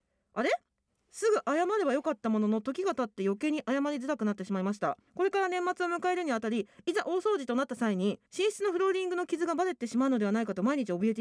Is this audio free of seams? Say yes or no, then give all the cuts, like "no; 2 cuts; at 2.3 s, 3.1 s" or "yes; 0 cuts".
no; 2 cuts; at 5.1 s, 8.3 s